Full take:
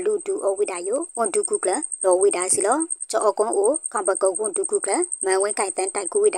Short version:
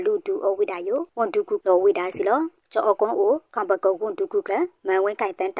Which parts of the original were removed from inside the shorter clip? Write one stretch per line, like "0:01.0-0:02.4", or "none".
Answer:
0:01.6-0:02.0